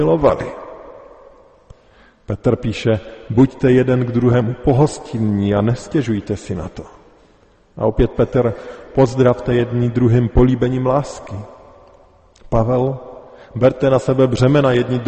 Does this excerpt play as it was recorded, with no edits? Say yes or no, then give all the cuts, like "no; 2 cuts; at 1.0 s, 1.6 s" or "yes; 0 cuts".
yes; 0 cuts